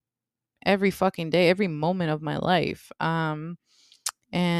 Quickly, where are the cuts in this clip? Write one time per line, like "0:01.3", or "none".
none